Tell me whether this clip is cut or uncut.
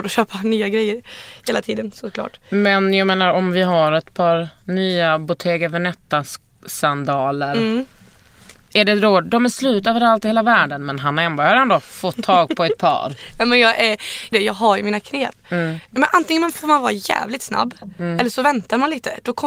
cut